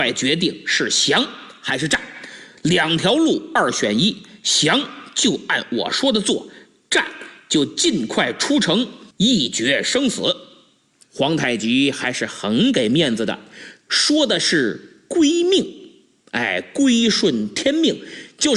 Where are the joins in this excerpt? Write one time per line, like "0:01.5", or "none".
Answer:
0:11.0
0:13.9